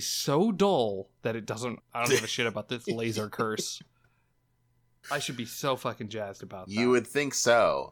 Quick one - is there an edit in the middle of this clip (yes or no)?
yes